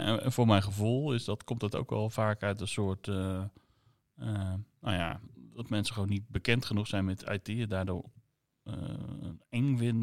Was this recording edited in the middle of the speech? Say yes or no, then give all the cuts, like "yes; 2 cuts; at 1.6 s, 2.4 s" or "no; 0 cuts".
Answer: no; 0 cuts